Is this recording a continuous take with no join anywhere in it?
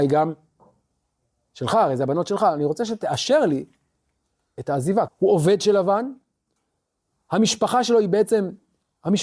no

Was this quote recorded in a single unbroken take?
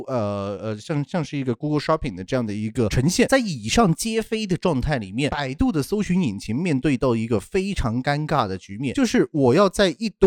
yes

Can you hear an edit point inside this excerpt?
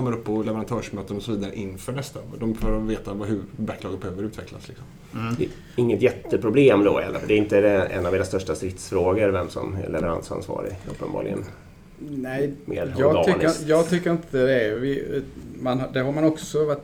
no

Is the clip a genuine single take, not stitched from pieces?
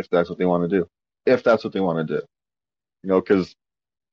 yes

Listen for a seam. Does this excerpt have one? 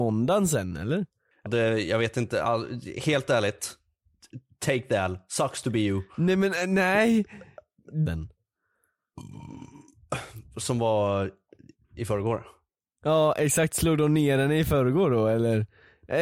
yes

